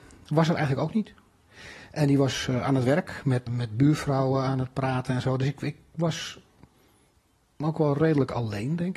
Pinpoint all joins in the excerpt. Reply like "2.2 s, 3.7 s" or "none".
3.5 s